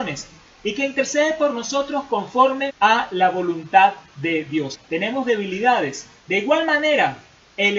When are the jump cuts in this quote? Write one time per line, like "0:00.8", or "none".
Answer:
0:02.7
0:04.7
0:06.2

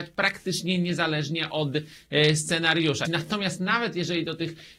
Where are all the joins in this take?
0:03.0

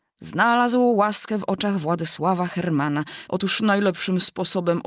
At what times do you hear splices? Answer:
0:03.3

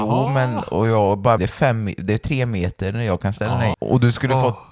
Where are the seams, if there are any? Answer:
0:01.4
0:03.7

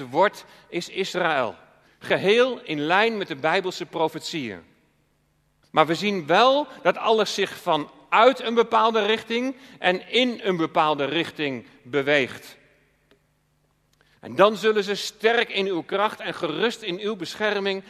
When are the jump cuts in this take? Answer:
0:01.9
0:05.6
0:14.2

